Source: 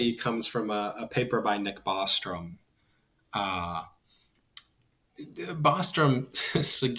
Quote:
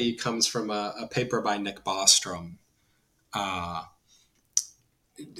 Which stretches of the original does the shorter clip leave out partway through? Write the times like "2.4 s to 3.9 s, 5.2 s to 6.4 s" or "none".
none